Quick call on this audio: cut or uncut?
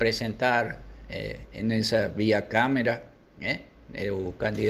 uncut